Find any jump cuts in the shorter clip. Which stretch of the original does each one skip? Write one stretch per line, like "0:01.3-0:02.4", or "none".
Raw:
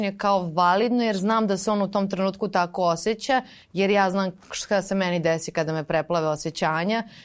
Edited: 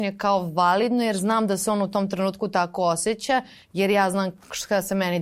none